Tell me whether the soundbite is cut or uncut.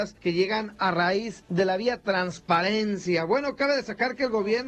uncut